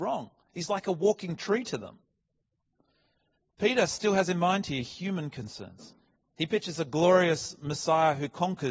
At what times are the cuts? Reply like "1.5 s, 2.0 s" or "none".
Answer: none